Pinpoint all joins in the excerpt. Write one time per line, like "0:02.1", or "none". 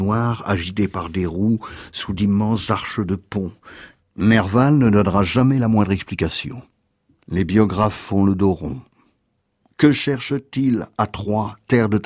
none